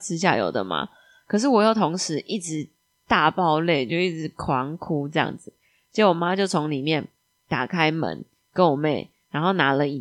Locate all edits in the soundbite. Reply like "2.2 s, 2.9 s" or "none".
none